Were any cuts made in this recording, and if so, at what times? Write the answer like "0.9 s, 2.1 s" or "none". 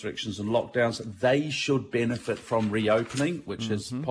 none